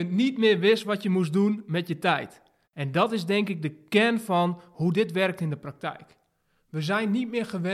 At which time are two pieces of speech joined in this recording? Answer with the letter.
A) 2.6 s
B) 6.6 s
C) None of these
A